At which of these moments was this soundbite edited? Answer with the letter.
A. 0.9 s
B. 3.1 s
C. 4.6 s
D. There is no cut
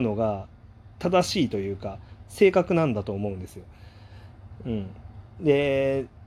A